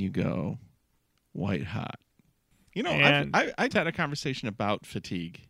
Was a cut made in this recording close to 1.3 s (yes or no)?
no